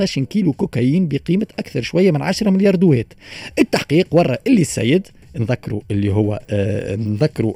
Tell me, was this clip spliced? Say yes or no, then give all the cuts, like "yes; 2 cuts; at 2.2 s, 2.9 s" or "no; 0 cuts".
yes; 1 cut; at 6.4 s